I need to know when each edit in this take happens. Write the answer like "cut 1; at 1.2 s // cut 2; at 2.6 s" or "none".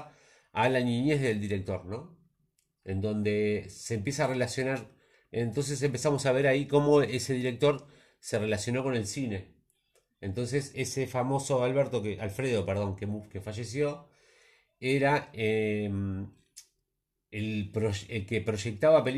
cut 1; at 10.7 s